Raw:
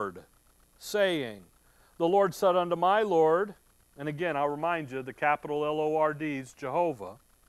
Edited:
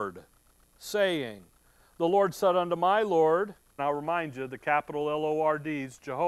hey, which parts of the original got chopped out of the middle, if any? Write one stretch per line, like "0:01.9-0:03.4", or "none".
0:03.8-0:04.3

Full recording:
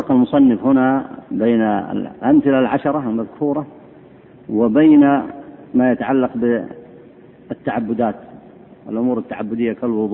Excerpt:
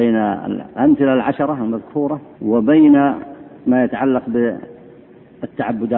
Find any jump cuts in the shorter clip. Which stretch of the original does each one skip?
0:03.8-0:04.4

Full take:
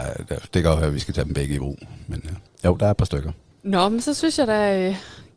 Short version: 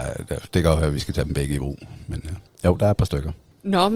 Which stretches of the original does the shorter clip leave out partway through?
none

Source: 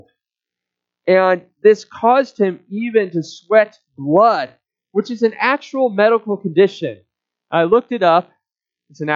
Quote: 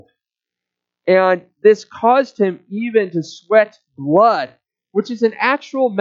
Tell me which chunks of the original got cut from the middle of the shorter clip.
none

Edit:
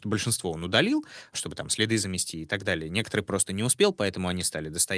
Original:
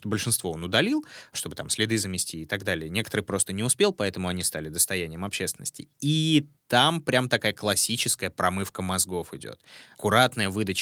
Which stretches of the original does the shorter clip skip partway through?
none

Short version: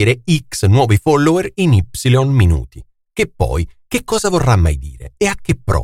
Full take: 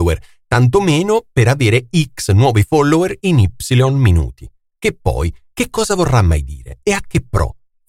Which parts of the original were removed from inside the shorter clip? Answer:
none

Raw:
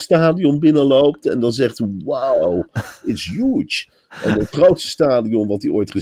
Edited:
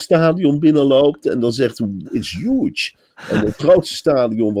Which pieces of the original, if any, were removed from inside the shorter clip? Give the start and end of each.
0:02.0-0:03.0

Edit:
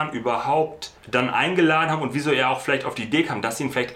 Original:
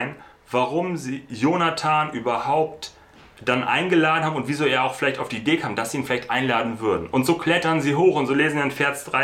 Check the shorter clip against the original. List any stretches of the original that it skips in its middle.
0:03.0-0:03.3

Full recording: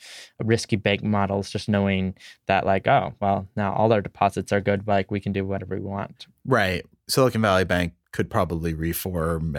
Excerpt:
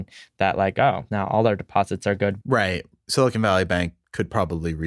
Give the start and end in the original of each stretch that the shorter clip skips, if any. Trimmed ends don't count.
0:03.2-0:03.5
0:04.8-0:06.4

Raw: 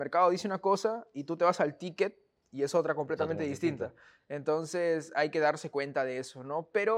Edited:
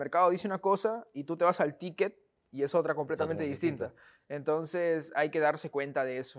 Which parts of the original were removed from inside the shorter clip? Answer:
none

